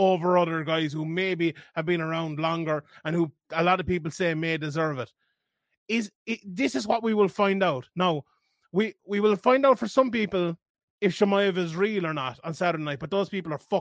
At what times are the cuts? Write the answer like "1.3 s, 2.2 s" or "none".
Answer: none

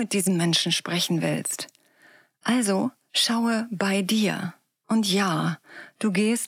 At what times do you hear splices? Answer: none

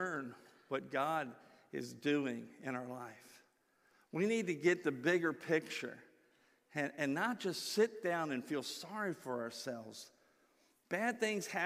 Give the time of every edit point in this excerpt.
none

